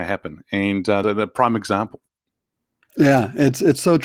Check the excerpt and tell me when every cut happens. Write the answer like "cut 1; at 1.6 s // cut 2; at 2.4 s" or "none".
cut 1; at 1.0 s